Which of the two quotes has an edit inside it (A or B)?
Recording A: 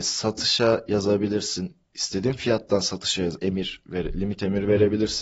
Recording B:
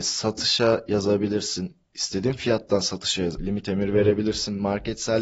B